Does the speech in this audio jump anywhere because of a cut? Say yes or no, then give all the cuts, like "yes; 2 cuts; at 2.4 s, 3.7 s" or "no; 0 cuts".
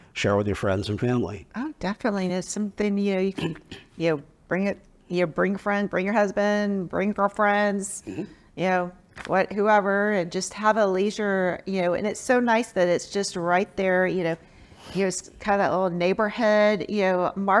no; 0 cuts